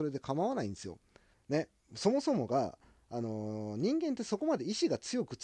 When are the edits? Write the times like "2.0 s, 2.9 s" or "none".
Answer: 1.3 s